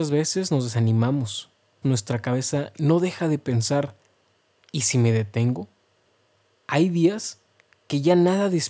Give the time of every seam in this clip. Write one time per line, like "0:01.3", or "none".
0:01.8